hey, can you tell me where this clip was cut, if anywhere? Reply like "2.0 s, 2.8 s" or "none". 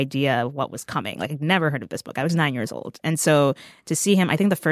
none